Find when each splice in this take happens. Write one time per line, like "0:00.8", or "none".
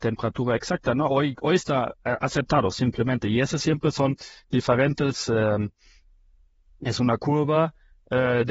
none